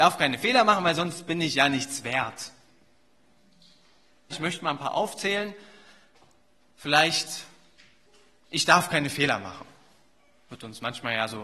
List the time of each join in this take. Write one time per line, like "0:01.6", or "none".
0:04.3